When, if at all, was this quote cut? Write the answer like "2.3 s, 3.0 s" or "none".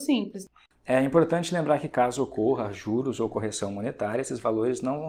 none